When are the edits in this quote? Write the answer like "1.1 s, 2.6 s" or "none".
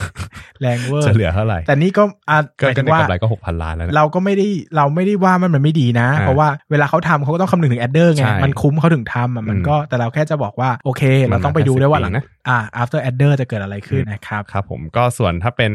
14.0 s